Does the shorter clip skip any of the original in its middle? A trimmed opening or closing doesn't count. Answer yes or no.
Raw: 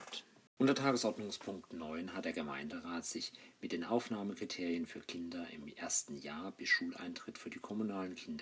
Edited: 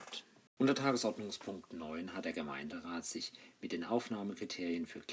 no